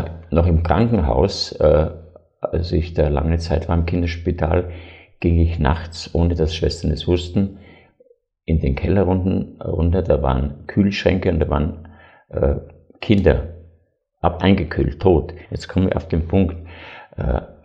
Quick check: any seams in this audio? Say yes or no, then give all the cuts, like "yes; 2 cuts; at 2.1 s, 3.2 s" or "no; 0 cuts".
yes; 1 cut; at 15.4 s